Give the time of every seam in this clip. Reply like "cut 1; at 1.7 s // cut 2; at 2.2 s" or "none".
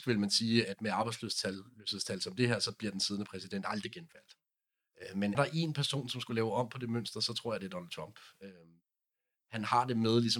cut 1; at 5.3 s